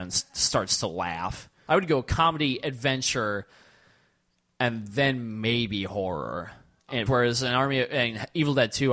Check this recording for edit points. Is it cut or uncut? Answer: cut